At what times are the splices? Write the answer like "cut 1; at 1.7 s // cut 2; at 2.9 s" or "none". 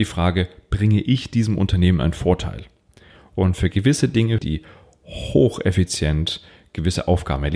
cut 1; at 3.2 s // cut 2; at 4.4 s